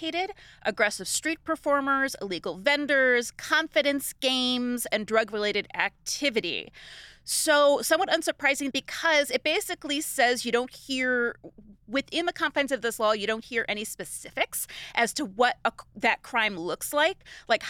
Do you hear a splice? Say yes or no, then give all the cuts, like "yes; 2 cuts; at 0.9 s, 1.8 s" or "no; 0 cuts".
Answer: yes; 1 cut; at 8.7 s